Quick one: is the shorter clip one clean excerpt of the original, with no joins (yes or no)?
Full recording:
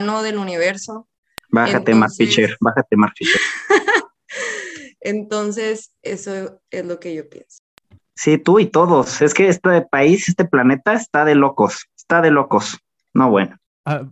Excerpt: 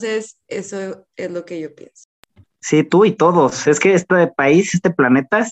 yes